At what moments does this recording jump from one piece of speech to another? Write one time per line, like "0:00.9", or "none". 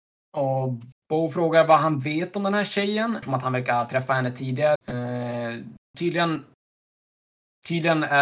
0:03.2
0:04.8
0:05.9